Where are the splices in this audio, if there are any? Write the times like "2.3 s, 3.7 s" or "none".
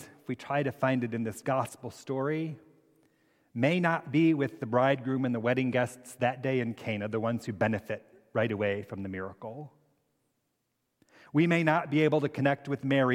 none